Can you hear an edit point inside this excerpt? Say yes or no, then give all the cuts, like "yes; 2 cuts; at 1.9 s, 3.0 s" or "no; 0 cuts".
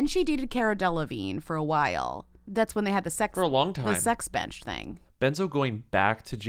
yes; 1 cut; at 5.0 s